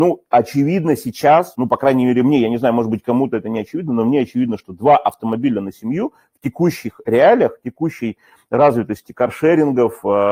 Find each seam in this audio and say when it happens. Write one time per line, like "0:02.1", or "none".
0:01.5